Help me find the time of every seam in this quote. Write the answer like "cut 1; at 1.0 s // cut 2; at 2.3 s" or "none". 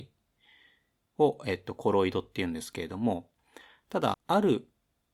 cut 1; at 4.1 s